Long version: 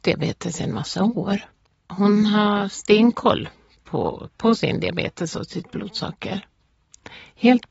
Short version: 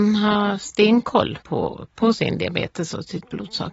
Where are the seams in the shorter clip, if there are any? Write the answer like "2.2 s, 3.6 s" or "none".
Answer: 1.4 s